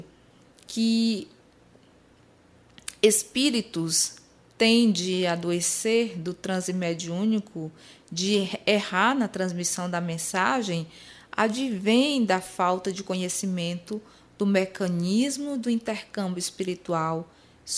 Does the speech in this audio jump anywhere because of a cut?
no; 0 cuts

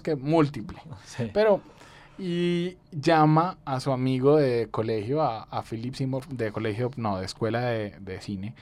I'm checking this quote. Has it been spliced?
no; 0 cuts

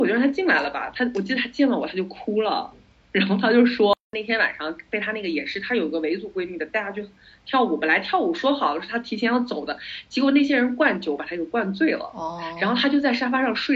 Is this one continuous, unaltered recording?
yes; 0 cuts

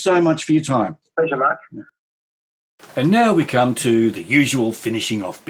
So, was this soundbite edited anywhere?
no; 0 cuts

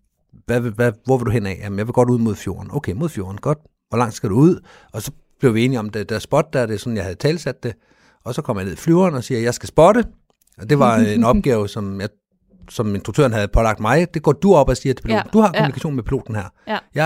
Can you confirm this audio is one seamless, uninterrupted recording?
yes; 0 cuts

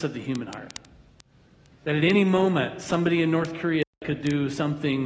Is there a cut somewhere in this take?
no; 0 cuts

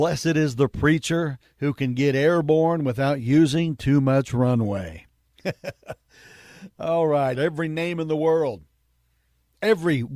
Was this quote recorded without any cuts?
no; 1 cut; at 7.3 s

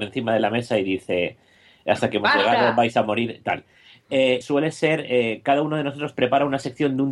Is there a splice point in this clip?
yes; 1 cut; at 4.4 s

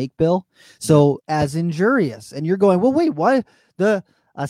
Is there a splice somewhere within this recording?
yes; 1 cut; at 1.2 s

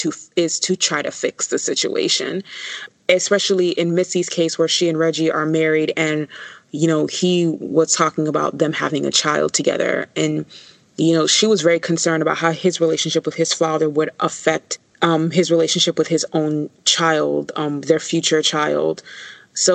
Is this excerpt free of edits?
yes; 0 cuts

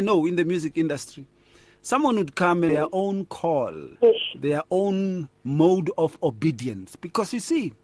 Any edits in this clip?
yes; 2 cuts; at 2.7 s, 4.0 s

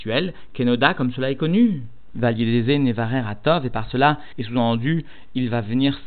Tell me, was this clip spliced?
yes; 2 cuts; at 2.1 s, 4.3 s

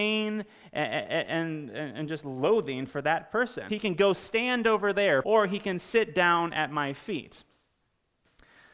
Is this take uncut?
no; 2 cuts; at 3.7 s, 5.2 s

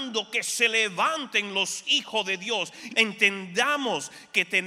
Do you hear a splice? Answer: yes; 1 cut; at 2.9 s

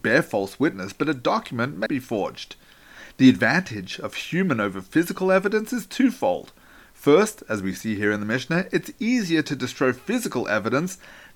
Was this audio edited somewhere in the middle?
yes; 1 cut; at 1.9 s

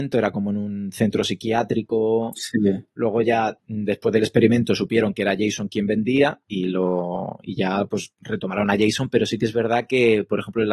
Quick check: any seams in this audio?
no; 0 cuts

